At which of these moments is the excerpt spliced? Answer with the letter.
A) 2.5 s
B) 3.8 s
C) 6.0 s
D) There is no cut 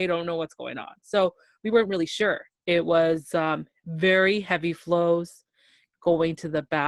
A